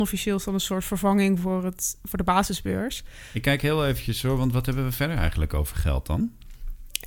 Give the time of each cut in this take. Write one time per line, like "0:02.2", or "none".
none